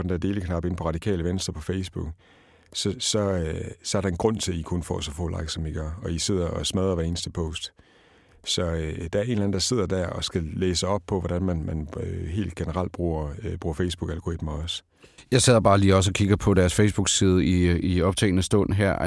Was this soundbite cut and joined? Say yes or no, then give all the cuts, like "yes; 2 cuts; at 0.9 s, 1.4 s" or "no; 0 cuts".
no; 0 cuts